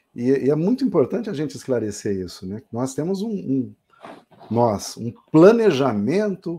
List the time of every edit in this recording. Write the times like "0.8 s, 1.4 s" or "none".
none